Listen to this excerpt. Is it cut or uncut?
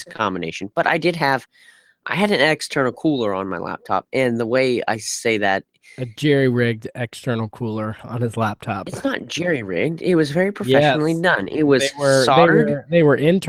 uncut